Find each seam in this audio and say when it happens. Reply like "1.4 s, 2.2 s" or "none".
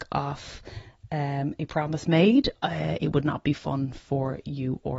none

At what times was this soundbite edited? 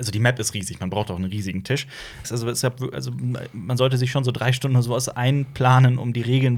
2.2 s

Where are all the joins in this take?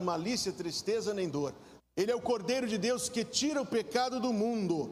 1.8 s

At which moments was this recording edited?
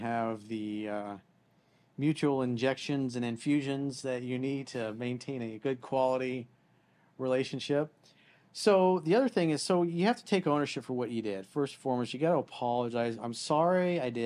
none

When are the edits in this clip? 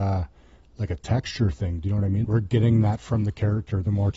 2.2 s

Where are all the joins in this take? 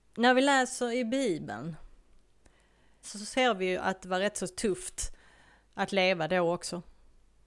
3.0 s

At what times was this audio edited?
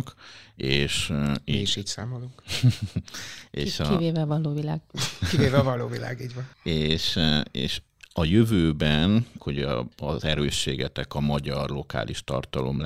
6.5 s, 9.4 s

